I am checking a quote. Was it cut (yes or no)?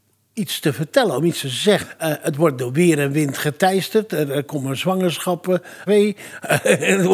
yes